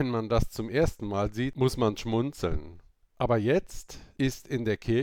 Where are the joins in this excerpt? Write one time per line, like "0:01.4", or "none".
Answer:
0:03.0